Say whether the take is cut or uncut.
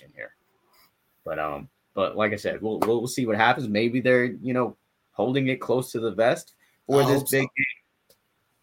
uncut